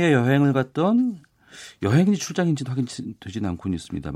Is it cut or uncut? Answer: uncut